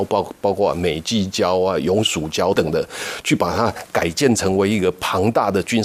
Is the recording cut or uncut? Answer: cut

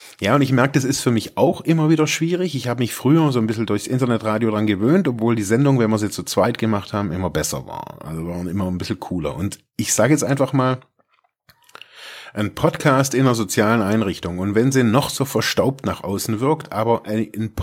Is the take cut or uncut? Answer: uncut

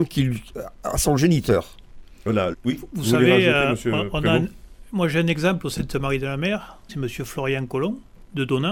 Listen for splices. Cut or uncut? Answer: cut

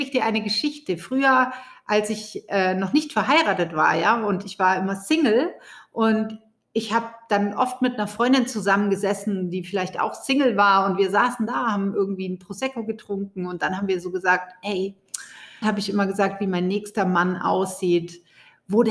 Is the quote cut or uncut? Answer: cut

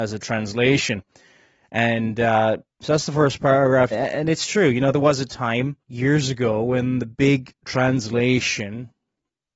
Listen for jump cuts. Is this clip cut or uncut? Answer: cut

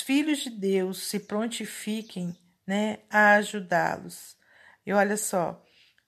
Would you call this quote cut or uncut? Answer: uncut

